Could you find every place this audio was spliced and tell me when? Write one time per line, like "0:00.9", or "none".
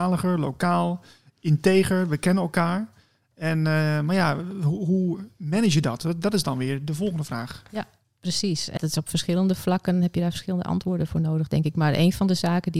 0:08.8